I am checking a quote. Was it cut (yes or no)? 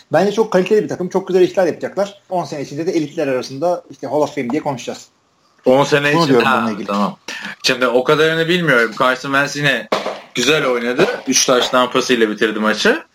yes